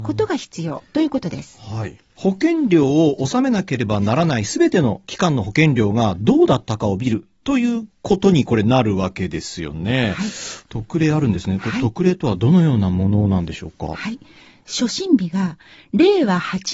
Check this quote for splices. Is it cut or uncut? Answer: cut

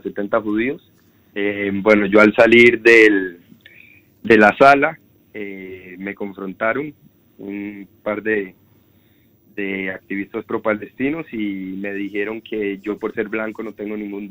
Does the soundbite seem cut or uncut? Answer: cut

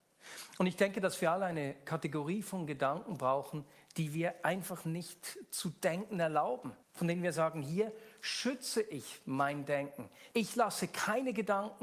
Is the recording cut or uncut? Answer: cut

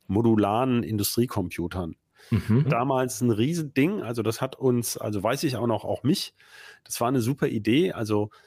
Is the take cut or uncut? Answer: cut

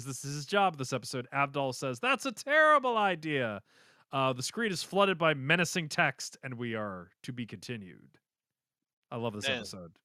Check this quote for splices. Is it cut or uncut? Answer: uncut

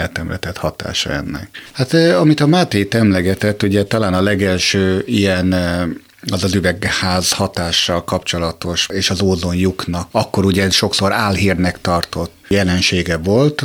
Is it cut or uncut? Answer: cut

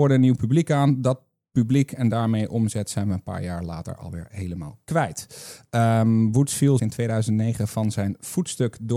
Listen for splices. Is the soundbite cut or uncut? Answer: cut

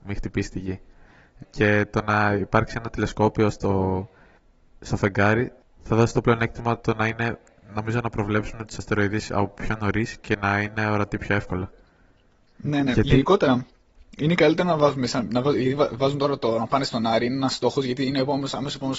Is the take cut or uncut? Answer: cut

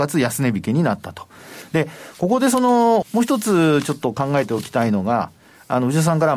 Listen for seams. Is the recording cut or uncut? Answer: cut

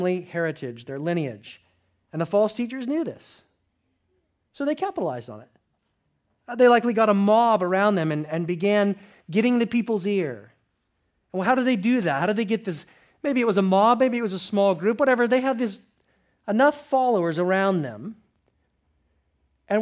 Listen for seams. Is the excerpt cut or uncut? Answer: uncut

